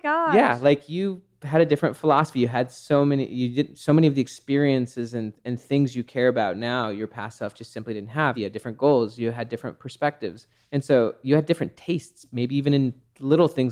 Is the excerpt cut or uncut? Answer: cut